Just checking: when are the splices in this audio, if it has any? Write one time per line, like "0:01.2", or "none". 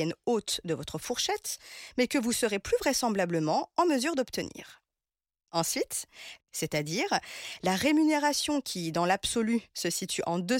0:06.4